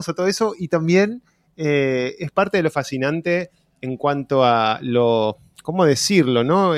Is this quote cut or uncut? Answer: uncut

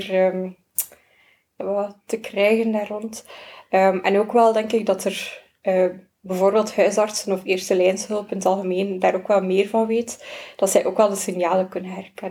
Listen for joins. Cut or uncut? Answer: cut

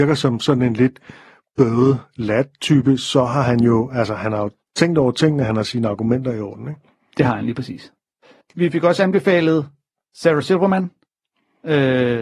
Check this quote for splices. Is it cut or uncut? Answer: cut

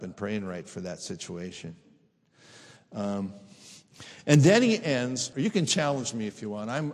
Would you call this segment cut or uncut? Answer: cut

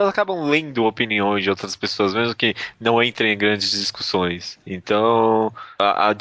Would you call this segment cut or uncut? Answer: uncut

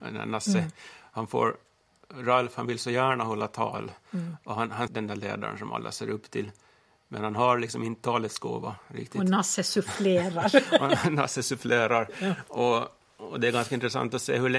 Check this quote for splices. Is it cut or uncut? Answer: cut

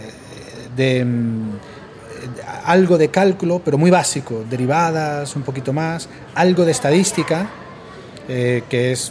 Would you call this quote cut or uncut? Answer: uncut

